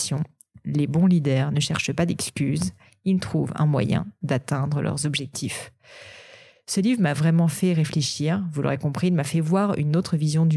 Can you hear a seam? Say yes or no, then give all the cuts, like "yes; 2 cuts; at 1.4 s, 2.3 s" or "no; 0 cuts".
no; 0 cuts